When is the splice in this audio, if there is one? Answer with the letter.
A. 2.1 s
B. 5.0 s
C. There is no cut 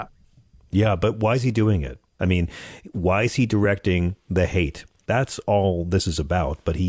B